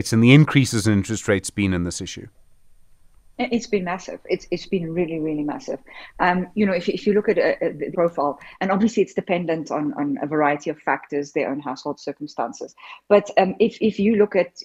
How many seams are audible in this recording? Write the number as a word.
one